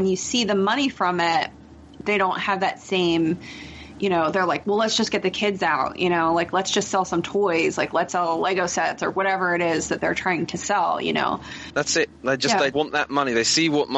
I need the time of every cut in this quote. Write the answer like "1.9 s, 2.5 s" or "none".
8.1 s, 11.7 s, 12.7 s

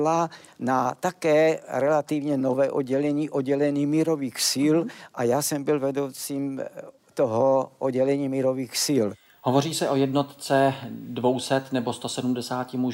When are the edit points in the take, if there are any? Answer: none

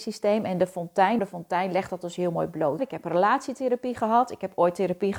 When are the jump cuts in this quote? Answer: 1.2 s, 2.8 s

